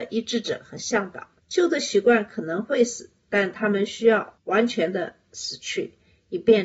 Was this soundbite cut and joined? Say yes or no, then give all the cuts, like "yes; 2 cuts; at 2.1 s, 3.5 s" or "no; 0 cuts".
yes; 1 cut; at 1.4 s